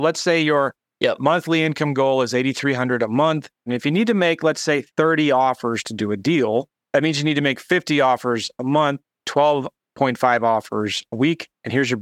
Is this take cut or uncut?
cut